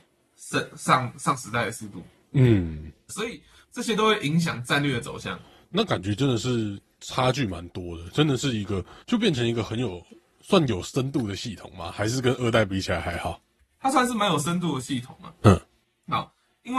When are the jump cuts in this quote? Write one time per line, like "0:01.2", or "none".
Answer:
0:03.1
0:09.0

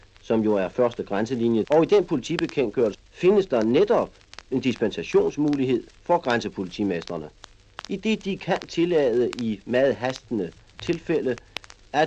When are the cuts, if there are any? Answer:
0:01.6
0:02.9
0:04.4

